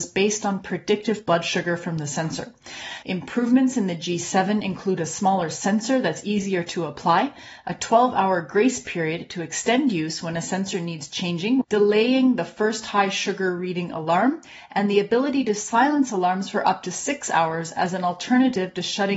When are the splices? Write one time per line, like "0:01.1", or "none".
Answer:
0:03.0
0:11.6